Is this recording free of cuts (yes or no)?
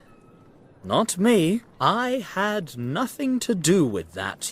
no